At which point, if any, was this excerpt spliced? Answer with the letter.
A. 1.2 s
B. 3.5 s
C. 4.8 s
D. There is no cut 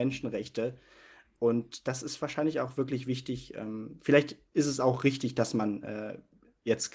D